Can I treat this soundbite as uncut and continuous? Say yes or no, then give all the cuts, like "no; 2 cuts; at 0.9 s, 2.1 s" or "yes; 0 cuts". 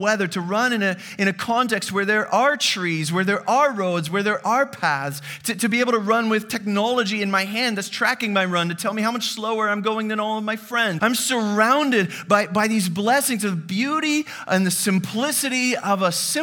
no; 1 cut; at 11.0 s